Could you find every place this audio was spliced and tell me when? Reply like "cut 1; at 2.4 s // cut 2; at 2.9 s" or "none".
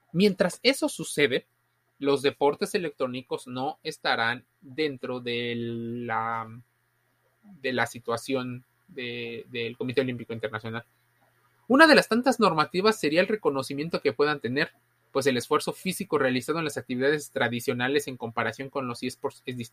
none